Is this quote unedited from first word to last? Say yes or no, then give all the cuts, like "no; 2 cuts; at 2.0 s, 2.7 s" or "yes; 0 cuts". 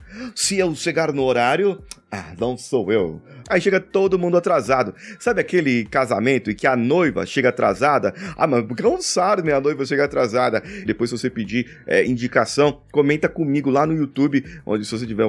no; 2 cuts; at 3.4 s, 10.9 s